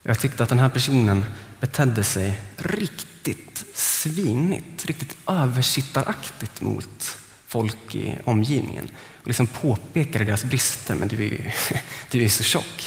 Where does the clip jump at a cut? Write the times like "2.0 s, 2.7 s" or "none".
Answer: none

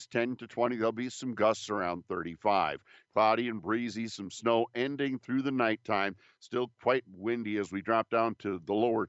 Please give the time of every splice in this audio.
none

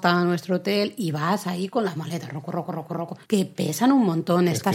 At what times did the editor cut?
3.2 s

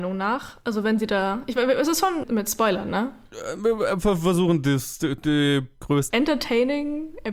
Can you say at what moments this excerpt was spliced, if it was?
2.2 s, 6.1 s

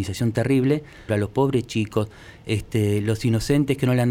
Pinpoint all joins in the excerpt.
1.1 s

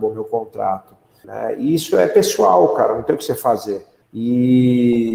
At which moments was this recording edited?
1.2 s, 4.0 s

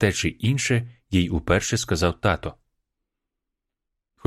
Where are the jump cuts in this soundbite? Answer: none

